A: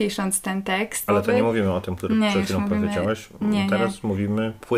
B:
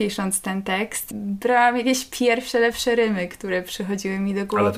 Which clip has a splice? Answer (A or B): A